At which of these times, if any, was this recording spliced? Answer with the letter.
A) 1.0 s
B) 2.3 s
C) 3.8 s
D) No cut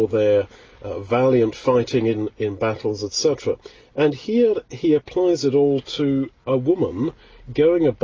D